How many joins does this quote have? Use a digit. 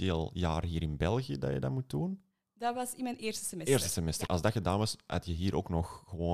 1